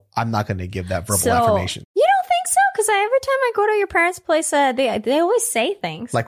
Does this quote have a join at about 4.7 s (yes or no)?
no